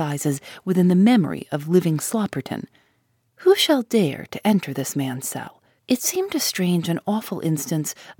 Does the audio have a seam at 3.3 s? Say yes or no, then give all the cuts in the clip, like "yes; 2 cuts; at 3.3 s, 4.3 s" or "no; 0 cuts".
yes; 2 cuts; at 3.3 s, 5.8 s